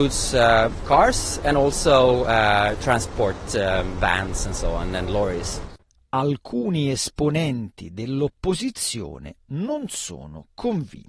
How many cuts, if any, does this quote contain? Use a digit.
0